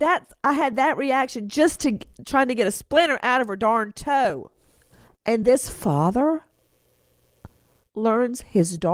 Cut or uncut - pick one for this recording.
uncut